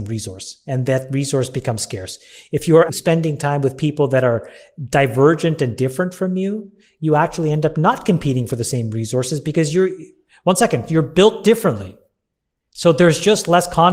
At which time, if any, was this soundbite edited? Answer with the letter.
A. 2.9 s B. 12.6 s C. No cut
A